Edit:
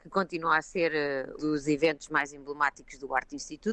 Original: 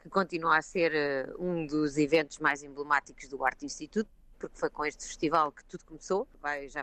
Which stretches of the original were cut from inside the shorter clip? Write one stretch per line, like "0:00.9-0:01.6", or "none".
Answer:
0:01.4-0:01.7